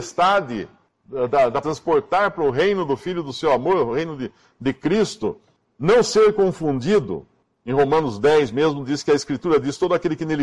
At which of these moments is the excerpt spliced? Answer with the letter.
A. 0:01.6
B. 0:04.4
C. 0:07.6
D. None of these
A